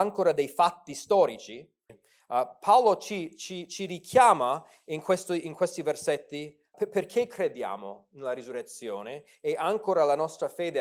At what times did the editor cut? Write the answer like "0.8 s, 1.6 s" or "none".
1.9 s, 6.7 s